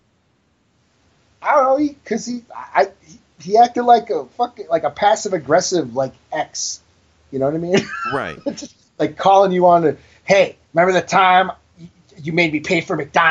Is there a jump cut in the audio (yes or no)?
yes